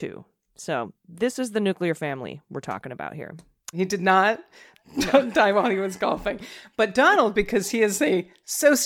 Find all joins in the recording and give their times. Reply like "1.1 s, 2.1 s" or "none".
3.7 s